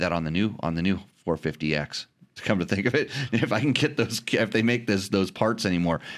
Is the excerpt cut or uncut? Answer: uncut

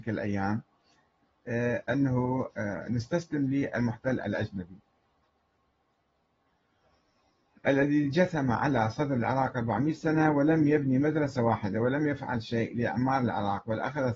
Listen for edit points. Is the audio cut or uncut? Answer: uncut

